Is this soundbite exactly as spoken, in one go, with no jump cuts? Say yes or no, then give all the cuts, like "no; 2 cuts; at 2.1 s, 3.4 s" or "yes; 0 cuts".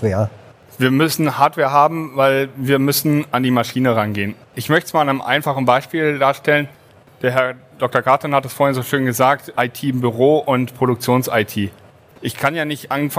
yes; 0 cuts